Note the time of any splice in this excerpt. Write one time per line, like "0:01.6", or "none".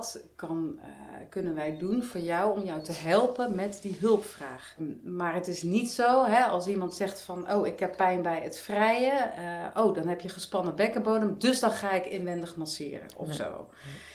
0:04.8